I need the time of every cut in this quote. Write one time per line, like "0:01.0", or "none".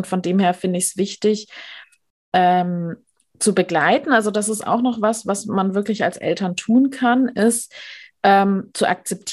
none